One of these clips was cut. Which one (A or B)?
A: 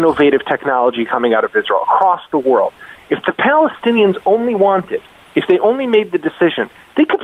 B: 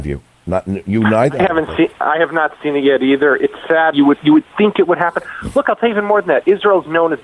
B